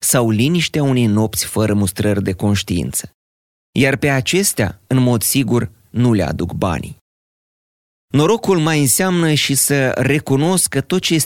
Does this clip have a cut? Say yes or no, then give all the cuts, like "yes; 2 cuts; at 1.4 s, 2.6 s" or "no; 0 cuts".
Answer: no; 0 cuts